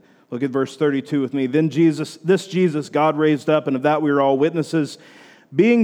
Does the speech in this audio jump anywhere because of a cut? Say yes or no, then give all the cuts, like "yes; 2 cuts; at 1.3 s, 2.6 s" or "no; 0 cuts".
no; 0 cuts